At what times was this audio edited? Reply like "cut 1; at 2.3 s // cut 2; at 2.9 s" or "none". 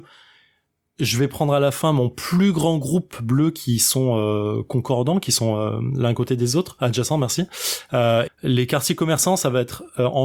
cut 1; at 8.3 s